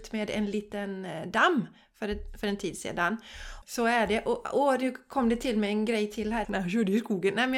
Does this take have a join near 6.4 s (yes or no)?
yes